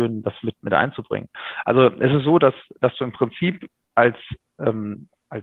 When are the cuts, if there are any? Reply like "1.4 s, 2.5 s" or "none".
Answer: none